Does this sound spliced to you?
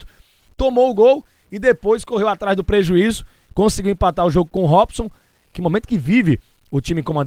yes; 1 cut; at 5.5 s

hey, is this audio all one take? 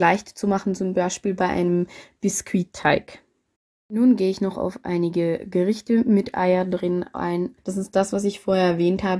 no; 1 cut; at 7.6 s

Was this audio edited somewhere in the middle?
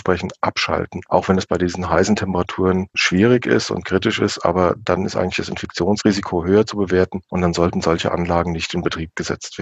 no; 0 cuts

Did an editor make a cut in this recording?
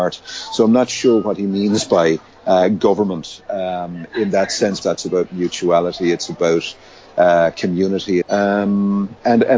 yes; 2 cuts; at 4.8 s, 8.2 s

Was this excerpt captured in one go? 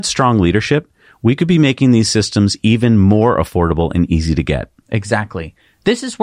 yes; 0 cuts

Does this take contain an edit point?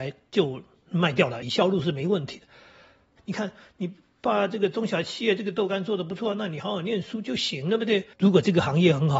yes; 3 cuts; at 1.4 s, 3.2 s, 8.1 s

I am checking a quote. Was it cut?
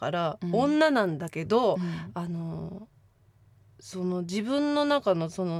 no; 0 cuts

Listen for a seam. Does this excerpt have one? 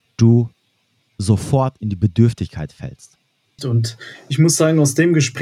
yes; 1 cut; at 3.6 s

